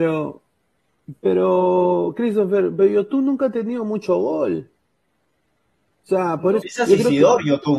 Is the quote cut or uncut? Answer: cut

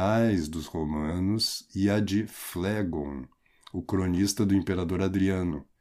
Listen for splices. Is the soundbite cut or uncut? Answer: uncut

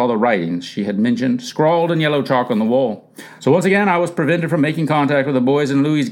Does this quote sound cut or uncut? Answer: cut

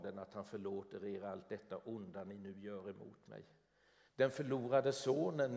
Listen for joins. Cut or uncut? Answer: cut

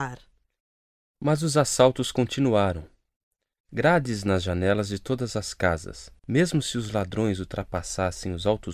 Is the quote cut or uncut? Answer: cut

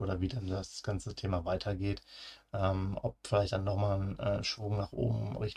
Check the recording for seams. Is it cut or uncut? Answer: uncut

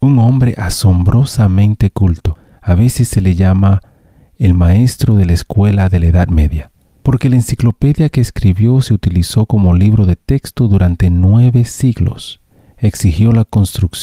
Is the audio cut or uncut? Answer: uncut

